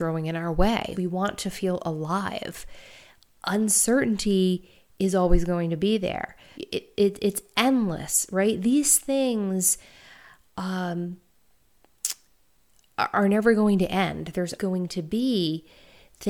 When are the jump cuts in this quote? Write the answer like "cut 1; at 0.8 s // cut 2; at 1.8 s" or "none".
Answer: cut 1; at 0.9 s // cut 2; at 6.5 s // cut 3; at 14.6 s